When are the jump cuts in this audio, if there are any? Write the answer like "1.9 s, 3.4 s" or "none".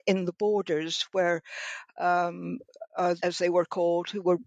3.2 s